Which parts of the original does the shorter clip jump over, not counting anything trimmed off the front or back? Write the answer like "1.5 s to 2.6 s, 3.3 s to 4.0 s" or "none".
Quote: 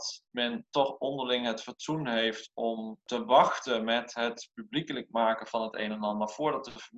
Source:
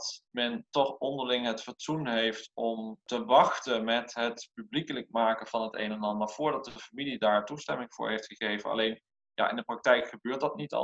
none